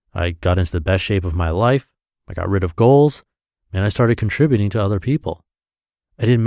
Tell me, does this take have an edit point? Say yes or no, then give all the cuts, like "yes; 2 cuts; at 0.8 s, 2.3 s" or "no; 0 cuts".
no; 0 cuts